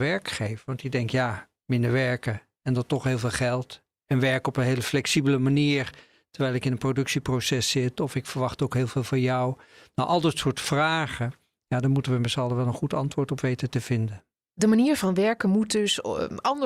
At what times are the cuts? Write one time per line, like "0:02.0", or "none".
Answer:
none